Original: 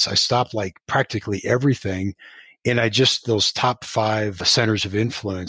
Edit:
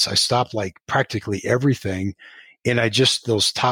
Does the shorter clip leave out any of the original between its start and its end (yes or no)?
no